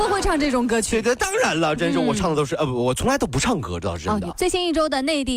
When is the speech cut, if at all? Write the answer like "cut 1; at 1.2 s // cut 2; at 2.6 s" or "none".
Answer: cut 1; at 4.3 s